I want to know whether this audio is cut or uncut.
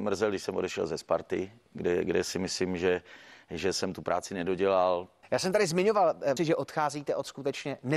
cut